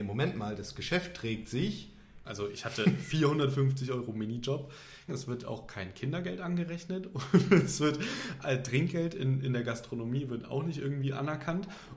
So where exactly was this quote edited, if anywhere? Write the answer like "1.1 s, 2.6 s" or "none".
2.2 s, 5.1 s